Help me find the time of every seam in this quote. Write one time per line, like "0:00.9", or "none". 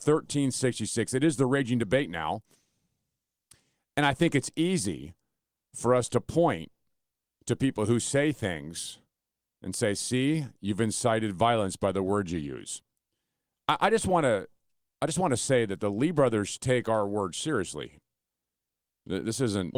none